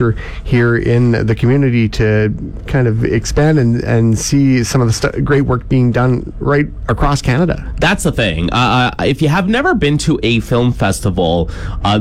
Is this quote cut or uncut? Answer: uncut